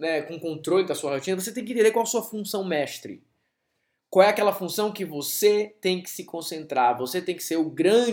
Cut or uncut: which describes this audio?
uncut